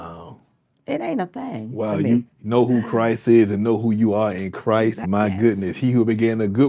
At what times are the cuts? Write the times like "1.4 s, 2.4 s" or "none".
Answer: 2.3 s, 5.0 s